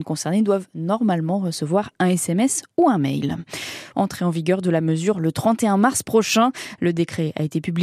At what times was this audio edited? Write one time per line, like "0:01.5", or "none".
0:03.9